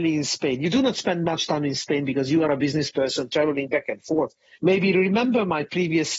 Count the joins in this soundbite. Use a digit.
1